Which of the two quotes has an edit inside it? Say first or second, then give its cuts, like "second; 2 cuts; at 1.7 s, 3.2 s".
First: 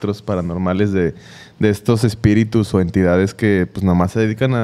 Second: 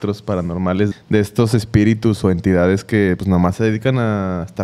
second; 2 cuts; at 0.9 s, 3.2 s